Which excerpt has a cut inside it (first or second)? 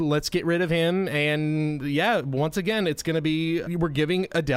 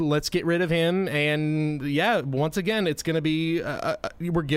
first